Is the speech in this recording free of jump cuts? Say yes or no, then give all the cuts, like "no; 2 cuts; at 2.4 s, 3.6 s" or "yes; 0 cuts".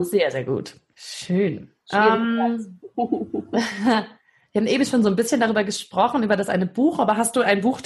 no; 1 cut; at 0.9 s